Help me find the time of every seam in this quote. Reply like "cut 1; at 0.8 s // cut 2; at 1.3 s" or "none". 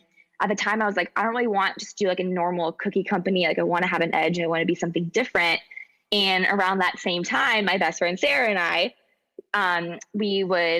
none